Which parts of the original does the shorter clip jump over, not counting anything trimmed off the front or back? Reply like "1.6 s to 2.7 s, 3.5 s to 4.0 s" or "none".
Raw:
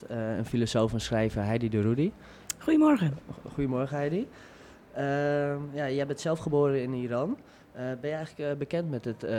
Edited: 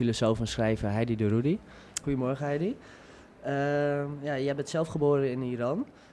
2.6 s to 3.5 s